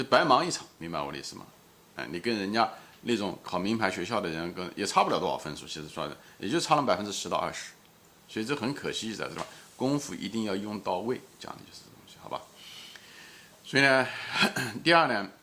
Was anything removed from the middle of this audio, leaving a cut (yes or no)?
no